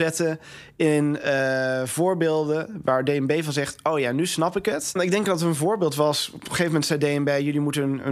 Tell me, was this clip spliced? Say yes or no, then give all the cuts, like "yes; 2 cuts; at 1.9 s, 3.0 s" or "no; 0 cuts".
no; 0 cuts